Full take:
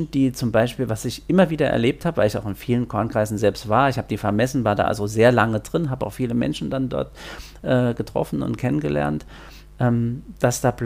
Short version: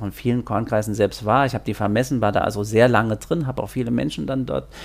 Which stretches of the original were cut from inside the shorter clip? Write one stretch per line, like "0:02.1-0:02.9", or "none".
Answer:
none